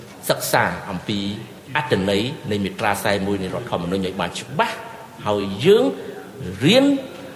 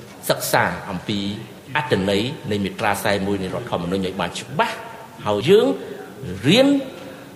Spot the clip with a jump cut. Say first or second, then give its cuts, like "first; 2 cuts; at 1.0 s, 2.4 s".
second; 1 cut; at 5.4 s